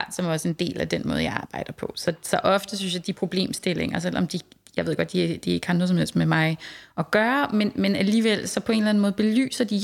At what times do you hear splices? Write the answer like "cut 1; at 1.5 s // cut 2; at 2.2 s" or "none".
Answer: none